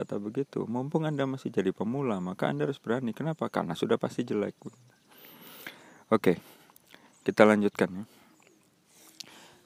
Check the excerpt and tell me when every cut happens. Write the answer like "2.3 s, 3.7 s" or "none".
none